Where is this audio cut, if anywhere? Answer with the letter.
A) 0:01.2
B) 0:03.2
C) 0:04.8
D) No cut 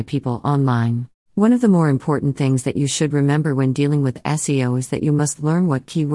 A